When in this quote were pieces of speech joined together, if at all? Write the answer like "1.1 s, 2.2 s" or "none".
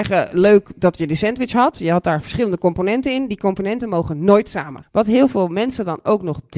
4.8 s